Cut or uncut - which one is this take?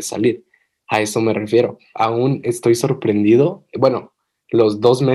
cut